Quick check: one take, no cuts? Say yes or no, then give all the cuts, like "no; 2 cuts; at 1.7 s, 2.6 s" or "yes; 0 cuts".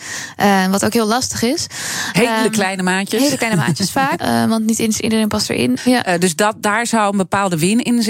no; 2 cuts; at 4.2 s, 5.8 s